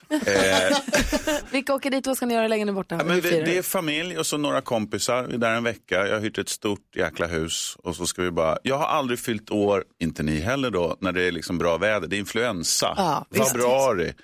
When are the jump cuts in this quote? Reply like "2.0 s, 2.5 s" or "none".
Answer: 9.9 s